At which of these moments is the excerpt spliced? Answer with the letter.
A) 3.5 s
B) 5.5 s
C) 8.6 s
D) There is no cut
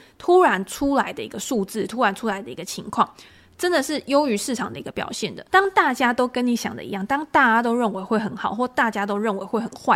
B